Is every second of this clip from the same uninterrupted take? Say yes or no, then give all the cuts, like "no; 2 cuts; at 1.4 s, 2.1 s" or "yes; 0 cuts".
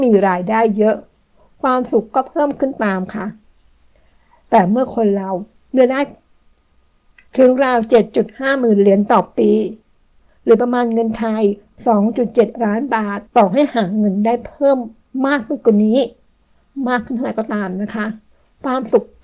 no; 1 cut; at 13.3 s